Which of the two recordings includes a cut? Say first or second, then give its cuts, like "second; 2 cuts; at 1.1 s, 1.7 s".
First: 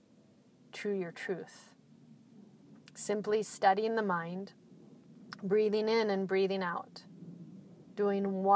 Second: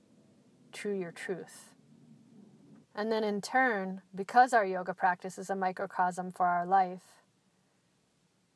second; 2 cuts; at 2.8 s, 4.1 s